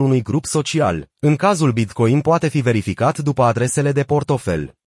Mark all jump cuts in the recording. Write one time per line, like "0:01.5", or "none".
0:01.1